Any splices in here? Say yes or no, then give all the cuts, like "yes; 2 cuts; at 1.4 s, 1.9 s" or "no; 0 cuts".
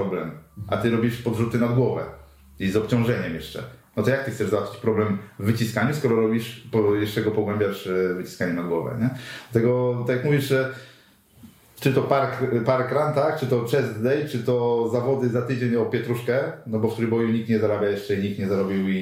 no; 0 cuts